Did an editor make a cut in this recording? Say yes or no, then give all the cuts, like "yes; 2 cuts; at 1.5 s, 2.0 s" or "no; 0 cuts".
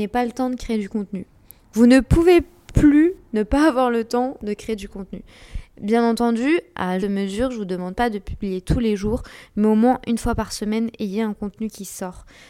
yes; 1 cut; at 7.0 s